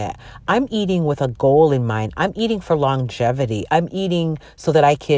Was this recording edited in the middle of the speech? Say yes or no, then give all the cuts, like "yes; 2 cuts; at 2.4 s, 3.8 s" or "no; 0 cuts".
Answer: yes; 1 cut; at 3.7 s